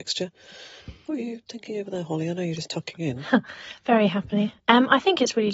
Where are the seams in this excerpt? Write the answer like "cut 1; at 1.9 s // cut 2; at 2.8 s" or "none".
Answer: none